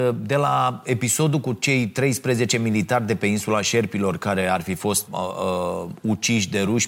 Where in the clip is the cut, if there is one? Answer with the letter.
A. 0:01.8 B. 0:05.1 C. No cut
B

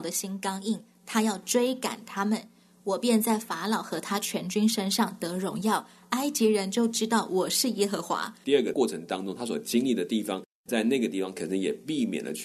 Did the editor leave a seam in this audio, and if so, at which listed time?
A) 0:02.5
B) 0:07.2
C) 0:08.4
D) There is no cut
C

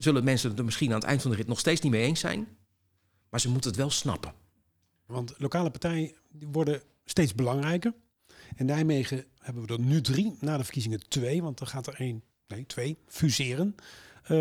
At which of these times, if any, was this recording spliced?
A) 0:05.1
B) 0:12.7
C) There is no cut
A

